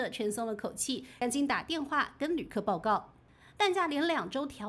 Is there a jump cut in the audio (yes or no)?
no